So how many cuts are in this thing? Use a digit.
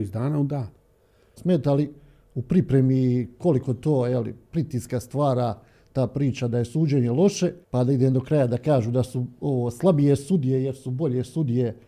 2